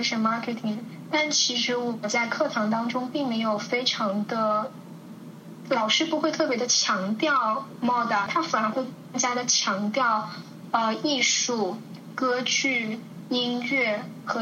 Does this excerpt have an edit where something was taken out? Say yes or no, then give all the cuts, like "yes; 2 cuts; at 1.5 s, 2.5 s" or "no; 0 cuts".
yes; 1 cut; at 8.3 s